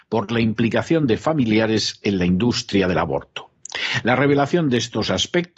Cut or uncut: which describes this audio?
uncut